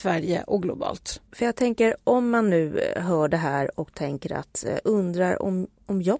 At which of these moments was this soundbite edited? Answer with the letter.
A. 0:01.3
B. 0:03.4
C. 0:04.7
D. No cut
A